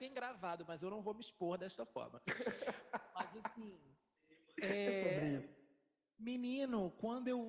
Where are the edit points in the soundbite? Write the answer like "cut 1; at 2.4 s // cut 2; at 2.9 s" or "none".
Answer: none